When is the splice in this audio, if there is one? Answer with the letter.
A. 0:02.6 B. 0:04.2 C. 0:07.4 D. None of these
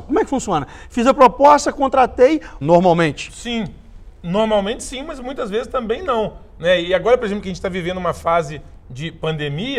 A